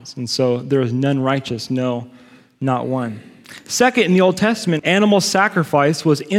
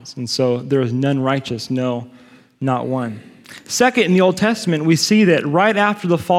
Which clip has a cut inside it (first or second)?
first